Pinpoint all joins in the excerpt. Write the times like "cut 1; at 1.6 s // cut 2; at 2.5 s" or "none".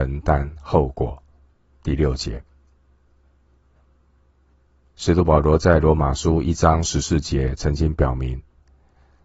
none